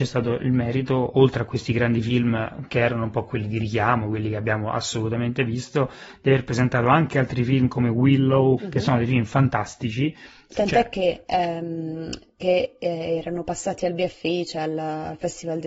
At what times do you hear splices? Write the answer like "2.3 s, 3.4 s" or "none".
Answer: 8.6 s, 10.5 s